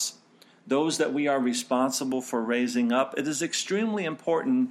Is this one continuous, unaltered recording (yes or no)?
yes